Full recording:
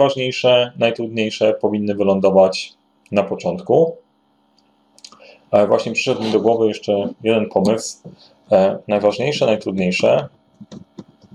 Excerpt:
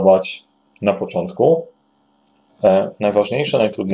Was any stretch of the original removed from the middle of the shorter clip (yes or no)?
yes